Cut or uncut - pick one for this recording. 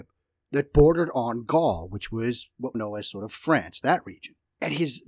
cut